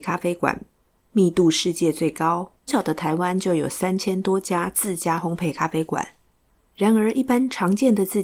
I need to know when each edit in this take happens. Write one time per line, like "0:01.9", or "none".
0:02.7